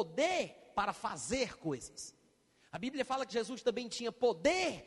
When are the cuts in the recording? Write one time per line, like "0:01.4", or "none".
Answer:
none